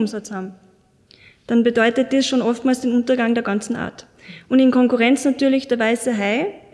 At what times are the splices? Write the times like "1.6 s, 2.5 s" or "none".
none